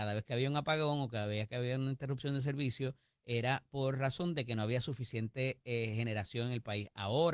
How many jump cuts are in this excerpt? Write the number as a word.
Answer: zero